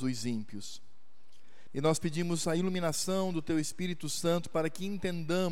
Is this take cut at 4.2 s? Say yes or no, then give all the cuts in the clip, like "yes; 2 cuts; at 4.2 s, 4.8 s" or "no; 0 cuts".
no; 1 cut; at 1.7 s